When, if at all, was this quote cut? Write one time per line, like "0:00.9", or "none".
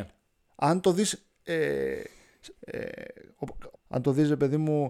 0:02.5
0:03.7